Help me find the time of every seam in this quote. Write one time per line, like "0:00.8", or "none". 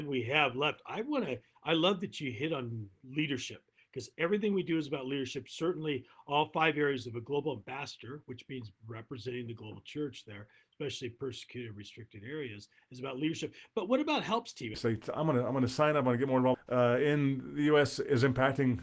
0:14.7
0:16.5